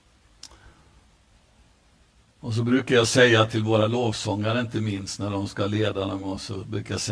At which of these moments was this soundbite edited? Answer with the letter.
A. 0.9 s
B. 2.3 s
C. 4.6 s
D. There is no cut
D